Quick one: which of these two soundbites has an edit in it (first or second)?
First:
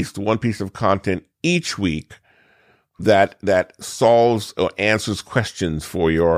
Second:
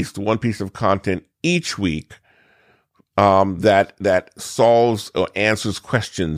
first